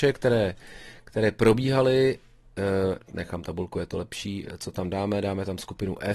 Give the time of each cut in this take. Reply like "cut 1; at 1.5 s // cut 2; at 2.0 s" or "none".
cut 1; at 3.1 s